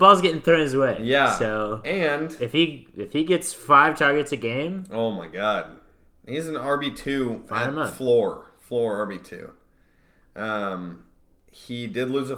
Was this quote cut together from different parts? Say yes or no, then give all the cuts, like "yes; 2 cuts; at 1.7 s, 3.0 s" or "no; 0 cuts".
no; 0 cuts